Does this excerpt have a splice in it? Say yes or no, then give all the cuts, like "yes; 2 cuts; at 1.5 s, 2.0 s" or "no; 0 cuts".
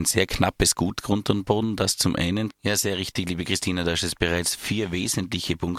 yes; 1 cut; at 2.5 s